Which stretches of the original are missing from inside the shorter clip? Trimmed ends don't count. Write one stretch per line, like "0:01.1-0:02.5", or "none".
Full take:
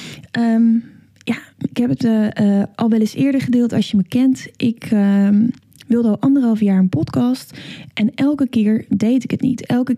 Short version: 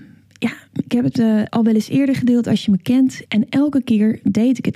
0:02.3-0:02.7
0:04.5-0:07.9